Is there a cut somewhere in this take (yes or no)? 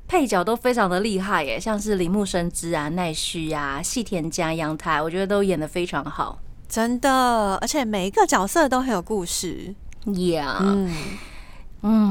no